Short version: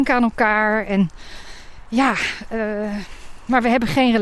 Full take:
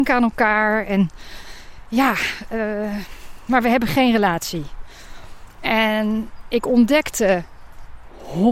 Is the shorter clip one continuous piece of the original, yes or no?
yes